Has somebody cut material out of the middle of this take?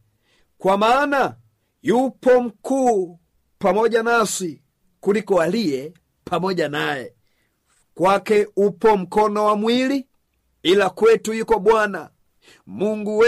yes; 1 cut; at 7.8 s

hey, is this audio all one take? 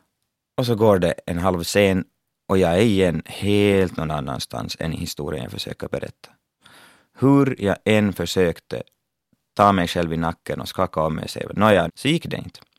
no; 1 cut; at 11.9 s

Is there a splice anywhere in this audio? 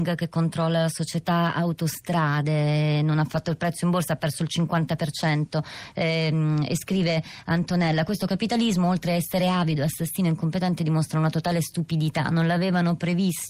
no; 0 cuts

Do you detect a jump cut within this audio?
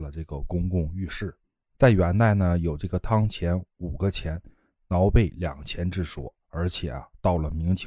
no; 0 cuts

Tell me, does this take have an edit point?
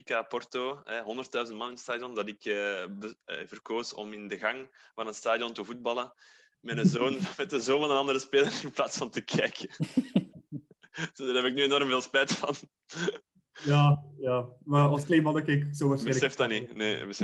no; 0 cuts

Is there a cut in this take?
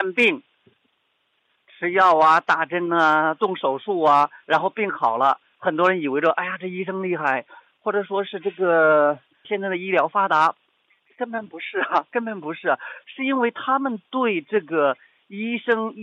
yes; 1 cut; at 9.4 s

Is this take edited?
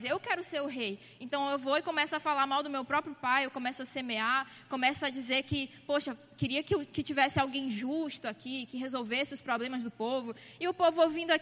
no; 0 cuts

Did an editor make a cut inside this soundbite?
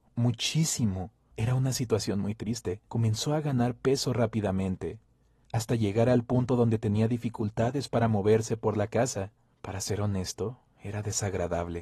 yes; 2 cuts; at 1.3 s, 2.9 s

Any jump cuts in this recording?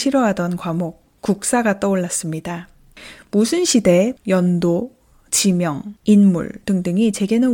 yes; 2 cuts; at 4.2 s, 6.0 s

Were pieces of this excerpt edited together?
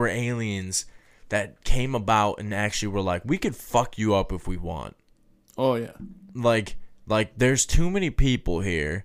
no; 0 cuts

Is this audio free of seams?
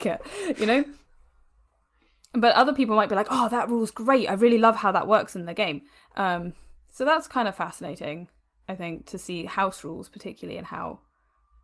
yes; 0 cuts

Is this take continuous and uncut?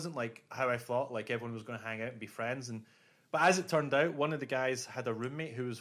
yes; 0 cuts

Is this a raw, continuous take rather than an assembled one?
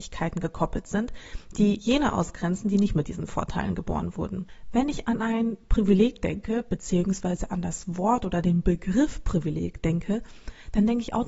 no; 1 cut; at 4.6 s

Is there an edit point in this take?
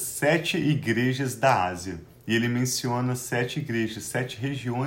no; 0 cuts

